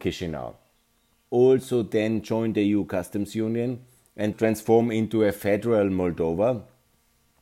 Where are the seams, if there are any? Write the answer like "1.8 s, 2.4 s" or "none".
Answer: 1.3 s, 4.3 s